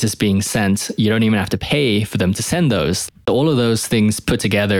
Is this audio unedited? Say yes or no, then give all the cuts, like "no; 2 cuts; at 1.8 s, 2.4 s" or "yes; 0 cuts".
no; 1 cut; at 3.1 s